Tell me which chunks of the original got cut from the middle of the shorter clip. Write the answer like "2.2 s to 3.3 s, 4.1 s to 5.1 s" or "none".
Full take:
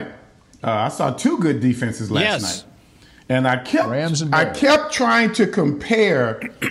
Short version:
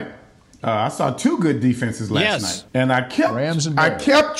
2.7 s to 3.2 s